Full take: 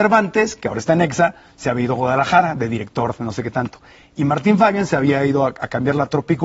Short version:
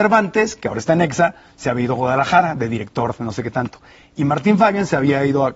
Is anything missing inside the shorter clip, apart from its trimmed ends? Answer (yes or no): no